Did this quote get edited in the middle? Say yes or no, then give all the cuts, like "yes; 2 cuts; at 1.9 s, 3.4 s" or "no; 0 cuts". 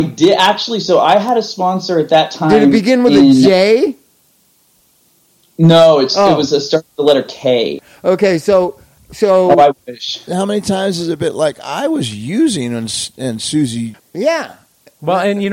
yes; 2 cuts; at 10.3 s, 14.0 s